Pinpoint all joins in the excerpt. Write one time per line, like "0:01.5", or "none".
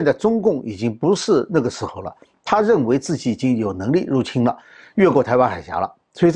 none